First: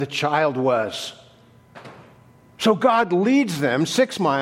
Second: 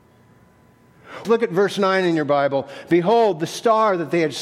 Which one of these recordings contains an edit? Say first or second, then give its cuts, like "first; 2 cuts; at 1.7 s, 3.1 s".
second; 1 cut; at 1.2 s